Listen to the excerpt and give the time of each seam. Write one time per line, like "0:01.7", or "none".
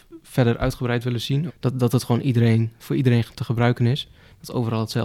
0:01.5